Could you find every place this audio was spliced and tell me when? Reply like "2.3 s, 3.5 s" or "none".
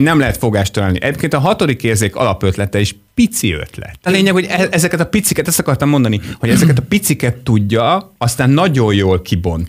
4.1 s